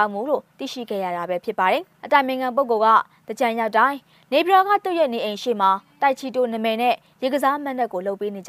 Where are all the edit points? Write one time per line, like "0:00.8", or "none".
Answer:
0:02.0